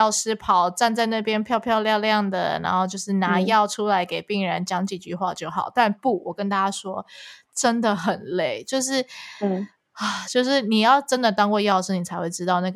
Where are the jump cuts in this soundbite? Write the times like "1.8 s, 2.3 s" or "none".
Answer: none